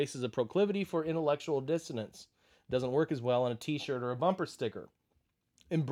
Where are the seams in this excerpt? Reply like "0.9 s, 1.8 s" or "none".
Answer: none